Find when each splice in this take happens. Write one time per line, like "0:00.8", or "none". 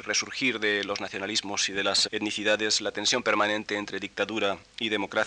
0:02.1